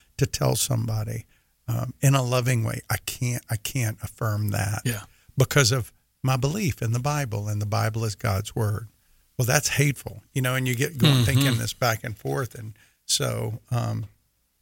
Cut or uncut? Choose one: uncut